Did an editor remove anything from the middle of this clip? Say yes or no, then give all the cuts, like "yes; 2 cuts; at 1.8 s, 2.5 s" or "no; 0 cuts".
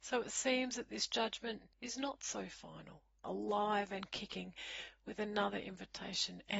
yes; 2 cuts; at 1.7 s, 3.2 s